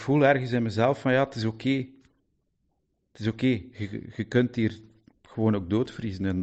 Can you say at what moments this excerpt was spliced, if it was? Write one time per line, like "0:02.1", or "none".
none

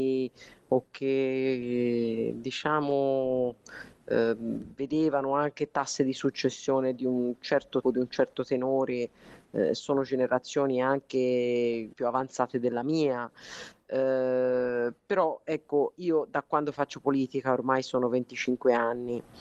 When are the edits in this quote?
0:07.8
0:11.9

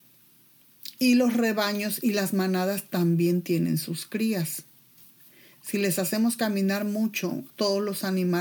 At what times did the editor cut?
0:07.5

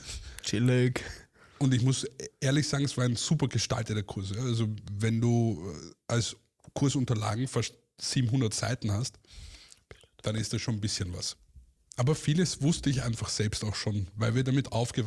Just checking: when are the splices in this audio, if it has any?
0:11.8

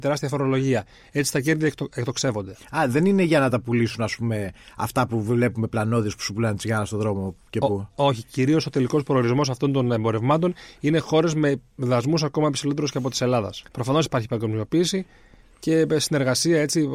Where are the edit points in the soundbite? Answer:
0:13.6

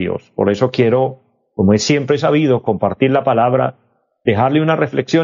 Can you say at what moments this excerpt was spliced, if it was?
none

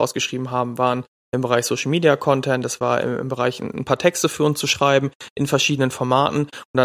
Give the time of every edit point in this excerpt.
none

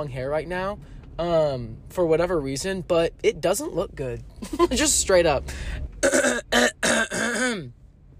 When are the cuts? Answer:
0:05.9

